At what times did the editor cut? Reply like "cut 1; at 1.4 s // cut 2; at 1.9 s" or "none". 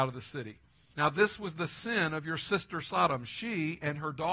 cut 1; at 0.9 s

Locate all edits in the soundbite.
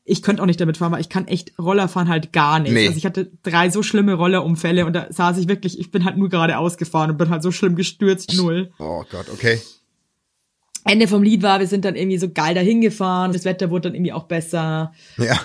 cut 1; at 8.3 s // cut 2; at 13.3 s

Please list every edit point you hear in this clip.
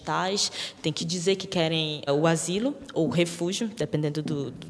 cut 1; at 2.1 s

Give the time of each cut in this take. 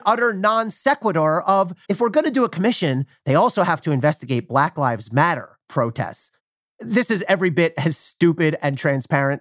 cut 1; at 1.9 s

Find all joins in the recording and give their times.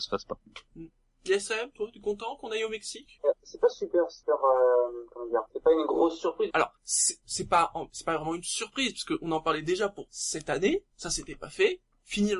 cut 1; at 6.5 s

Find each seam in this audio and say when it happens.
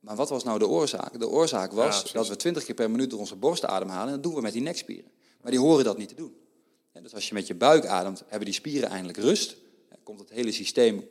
none

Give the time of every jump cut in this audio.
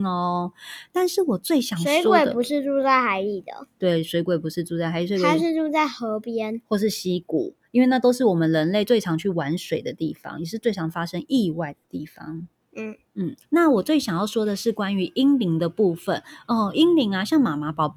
cut 1; at 13.4 s

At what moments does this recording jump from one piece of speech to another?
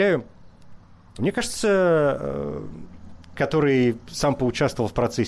cut 1; at 1.2 s // cut 2; at 3.4 s

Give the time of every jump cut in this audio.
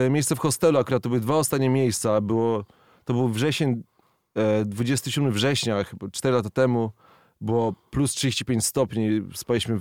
none

